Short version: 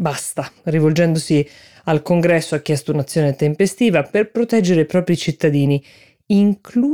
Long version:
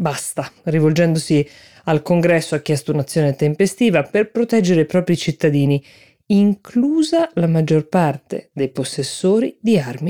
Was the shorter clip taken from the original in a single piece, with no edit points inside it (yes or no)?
yes